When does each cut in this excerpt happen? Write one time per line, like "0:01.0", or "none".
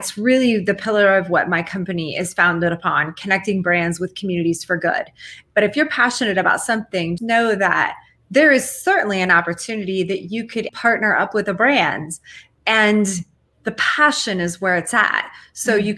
0:05.5
0:07.2
0:10.7